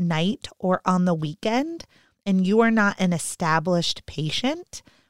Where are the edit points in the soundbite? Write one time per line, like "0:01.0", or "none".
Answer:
none